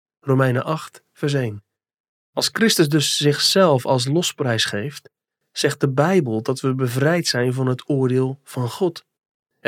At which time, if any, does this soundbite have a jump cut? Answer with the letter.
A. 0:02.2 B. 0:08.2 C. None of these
A